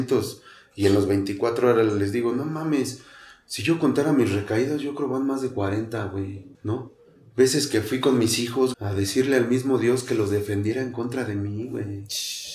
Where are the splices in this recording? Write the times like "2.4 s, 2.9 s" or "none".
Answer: 6.5 s, 8.7 s

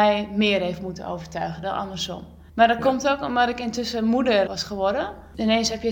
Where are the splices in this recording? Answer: 2.5 s, 4.5 s

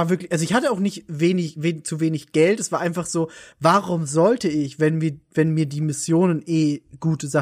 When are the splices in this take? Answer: none

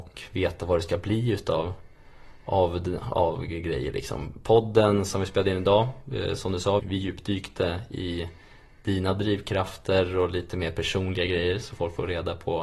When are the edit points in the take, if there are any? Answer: 6.8 s

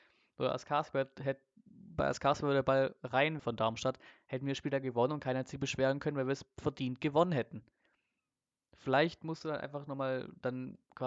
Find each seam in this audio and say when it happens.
3.4 s

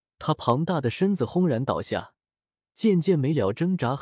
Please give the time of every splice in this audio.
2.6 s

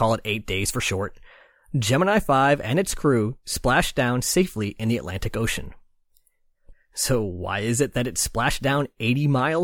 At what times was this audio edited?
6.7 s

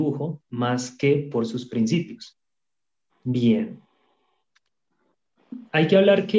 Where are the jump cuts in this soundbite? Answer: 3.1 s

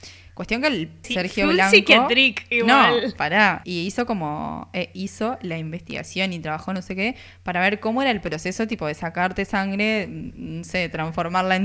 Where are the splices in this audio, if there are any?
1.0 s, 3.6 s

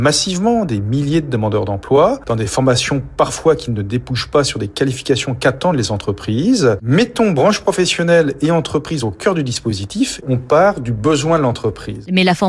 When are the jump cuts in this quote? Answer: none

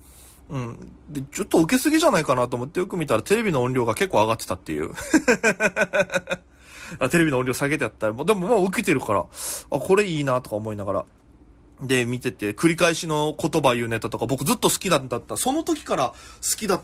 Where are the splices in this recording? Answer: none

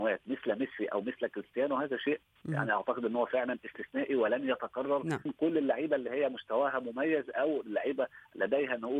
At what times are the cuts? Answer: 5.3 s

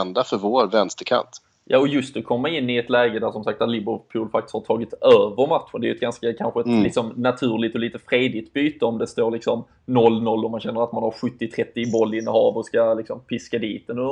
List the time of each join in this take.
none

